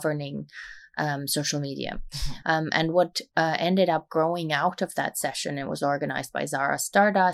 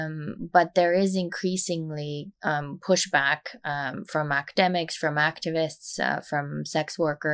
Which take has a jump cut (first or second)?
first